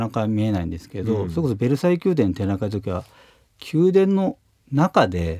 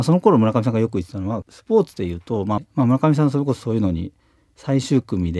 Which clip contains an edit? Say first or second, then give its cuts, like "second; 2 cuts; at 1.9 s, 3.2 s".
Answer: second; 1 cut; at 2.6 s